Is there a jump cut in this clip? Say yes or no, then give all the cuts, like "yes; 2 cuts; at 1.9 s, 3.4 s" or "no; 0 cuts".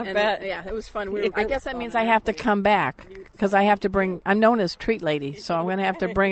yes; 1 cut; at 1.3 s